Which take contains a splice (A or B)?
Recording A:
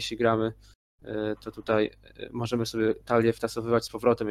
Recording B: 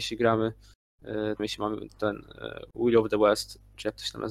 B